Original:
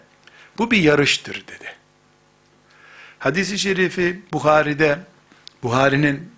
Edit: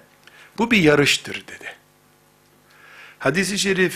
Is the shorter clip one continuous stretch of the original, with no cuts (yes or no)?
yes